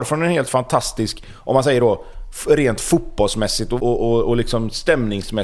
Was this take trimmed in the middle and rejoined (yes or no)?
yes